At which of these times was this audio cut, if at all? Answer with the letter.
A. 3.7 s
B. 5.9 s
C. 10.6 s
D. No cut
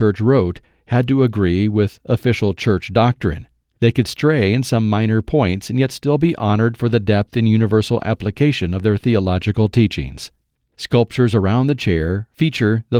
C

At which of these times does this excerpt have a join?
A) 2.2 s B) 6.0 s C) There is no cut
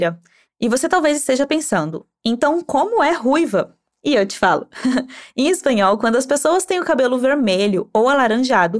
C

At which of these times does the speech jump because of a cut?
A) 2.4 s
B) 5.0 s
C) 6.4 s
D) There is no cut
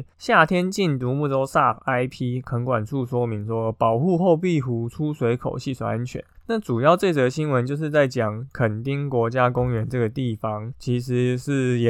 D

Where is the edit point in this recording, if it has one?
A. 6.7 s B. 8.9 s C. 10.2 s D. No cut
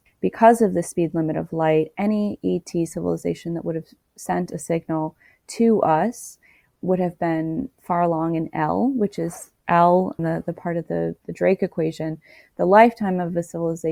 C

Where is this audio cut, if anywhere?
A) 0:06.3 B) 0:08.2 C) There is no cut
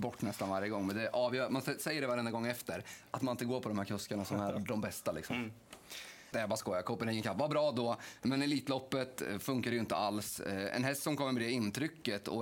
A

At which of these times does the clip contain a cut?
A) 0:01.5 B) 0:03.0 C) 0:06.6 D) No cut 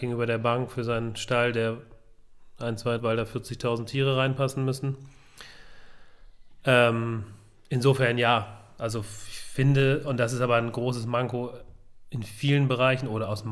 B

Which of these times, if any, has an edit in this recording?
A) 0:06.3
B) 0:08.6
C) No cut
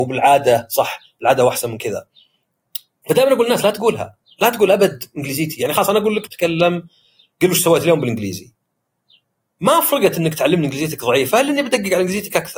A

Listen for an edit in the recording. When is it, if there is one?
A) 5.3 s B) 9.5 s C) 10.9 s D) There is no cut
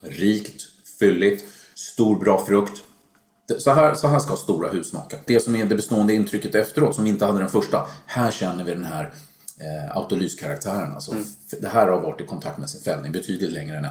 A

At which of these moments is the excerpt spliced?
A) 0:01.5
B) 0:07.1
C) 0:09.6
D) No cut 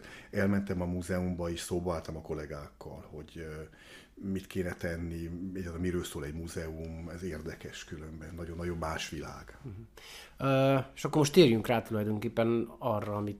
D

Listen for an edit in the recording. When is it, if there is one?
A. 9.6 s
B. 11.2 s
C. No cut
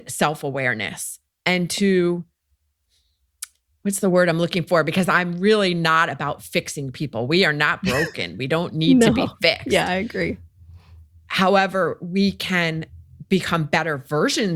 C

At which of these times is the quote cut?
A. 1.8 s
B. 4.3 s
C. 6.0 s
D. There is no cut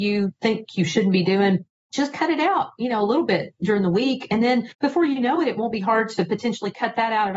D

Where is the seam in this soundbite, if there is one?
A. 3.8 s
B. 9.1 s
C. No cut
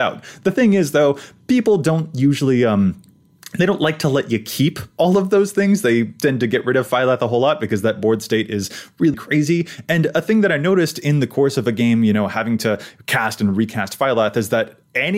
B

